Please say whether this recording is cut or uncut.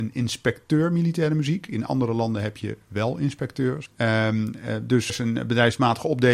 cut